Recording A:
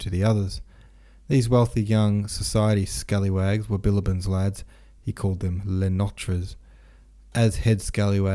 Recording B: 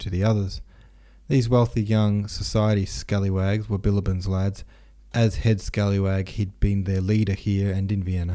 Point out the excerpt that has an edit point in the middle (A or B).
B